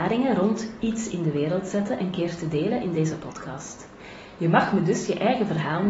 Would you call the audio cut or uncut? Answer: uncut